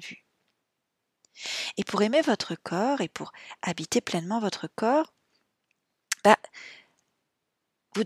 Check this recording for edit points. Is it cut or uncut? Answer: uncut